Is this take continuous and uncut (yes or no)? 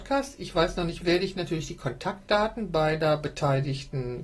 no